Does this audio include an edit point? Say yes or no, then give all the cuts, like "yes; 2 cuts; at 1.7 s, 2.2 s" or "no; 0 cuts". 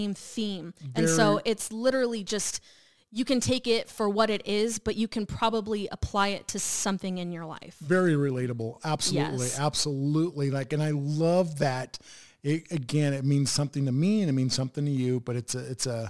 no; 0 cuts